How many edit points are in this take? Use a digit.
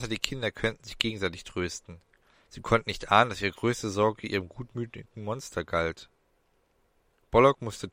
0